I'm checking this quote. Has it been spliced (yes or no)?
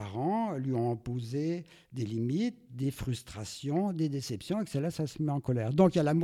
no